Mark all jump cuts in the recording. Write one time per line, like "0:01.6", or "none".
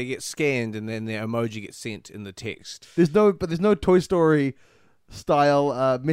0:02.8